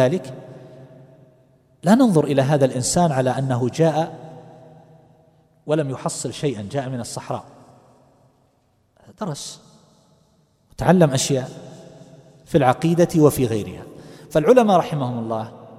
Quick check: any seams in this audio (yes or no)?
no